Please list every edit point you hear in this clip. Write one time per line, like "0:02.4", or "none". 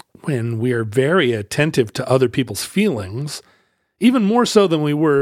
none